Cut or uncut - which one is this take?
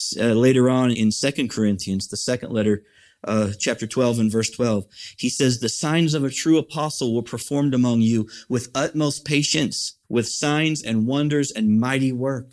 cut